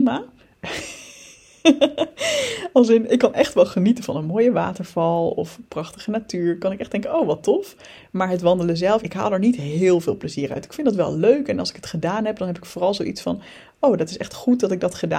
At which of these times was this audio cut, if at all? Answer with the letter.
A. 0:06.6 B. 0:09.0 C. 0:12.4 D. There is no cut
B